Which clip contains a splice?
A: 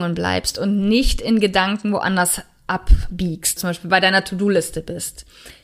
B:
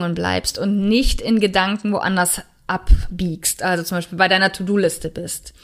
A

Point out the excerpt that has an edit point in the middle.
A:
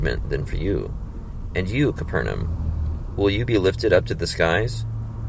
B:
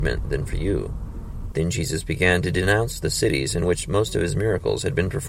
B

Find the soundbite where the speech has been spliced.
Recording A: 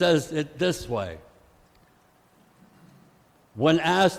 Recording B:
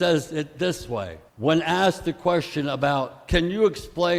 B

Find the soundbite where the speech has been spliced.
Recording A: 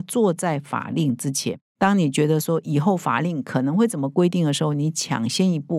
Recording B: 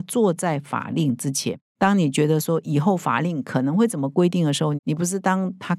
B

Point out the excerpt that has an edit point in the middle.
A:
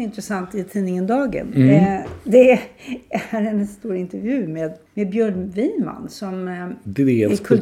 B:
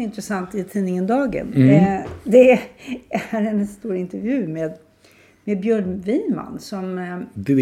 A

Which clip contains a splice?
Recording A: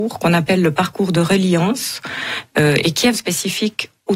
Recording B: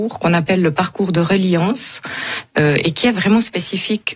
A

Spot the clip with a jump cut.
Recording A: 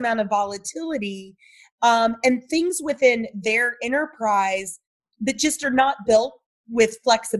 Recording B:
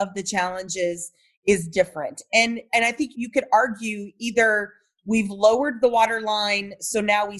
B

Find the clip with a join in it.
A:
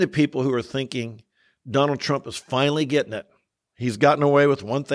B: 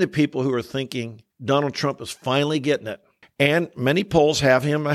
B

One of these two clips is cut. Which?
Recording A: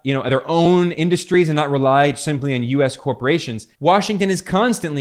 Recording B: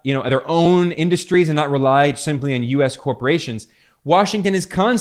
A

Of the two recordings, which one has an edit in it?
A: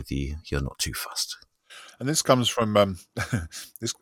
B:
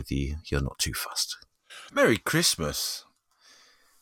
B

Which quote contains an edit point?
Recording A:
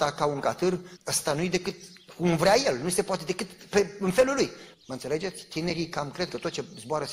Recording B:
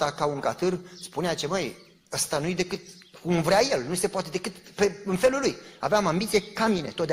A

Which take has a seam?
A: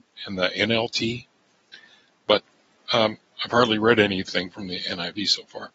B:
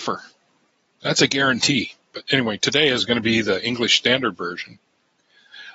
B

